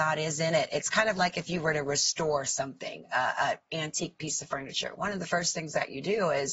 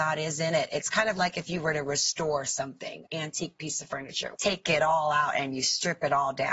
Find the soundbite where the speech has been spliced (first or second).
second